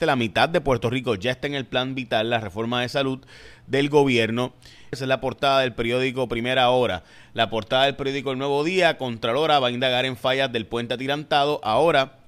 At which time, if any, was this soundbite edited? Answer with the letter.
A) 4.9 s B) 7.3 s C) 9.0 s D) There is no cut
A